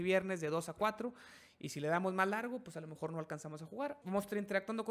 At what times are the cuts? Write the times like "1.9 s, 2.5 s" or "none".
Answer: 4.0 s